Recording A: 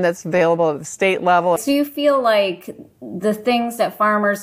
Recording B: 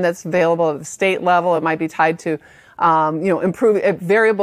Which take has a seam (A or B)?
A